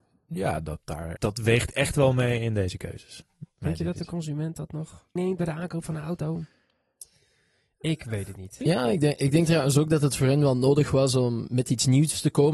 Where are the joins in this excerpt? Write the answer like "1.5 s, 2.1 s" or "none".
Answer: 1.2 s, 5.2 s, 8.6 s

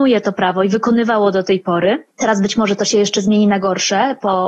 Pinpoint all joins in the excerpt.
2.1 s

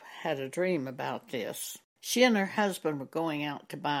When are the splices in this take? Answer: 1.9 s

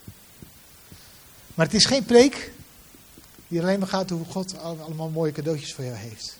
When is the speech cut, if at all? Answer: none

